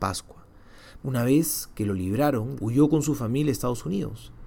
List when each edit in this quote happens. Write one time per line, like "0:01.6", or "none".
0:01.0
0:02.6